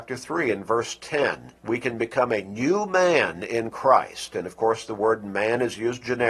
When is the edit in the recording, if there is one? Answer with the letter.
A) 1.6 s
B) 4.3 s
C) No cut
A